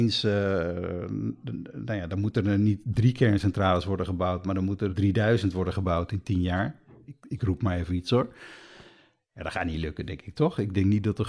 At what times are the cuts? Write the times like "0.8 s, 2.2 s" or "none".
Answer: 4.9 s